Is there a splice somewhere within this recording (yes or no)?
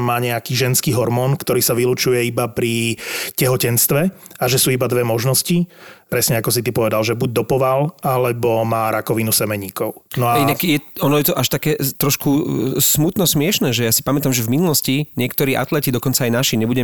no